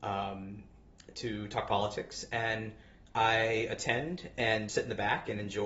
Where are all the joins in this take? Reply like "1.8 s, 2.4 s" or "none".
4.7 s